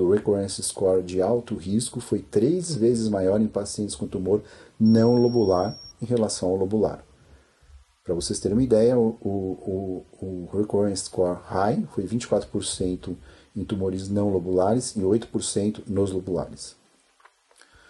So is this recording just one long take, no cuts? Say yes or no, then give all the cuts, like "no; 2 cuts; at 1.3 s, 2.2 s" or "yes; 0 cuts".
yes; 0 cuts